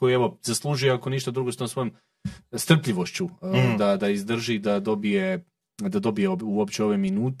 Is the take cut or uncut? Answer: uncut